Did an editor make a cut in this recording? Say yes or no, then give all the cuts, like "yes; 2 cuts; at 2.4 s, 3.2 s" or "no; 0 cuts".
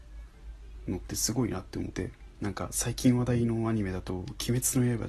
yes; 1 cut; at 1.9 s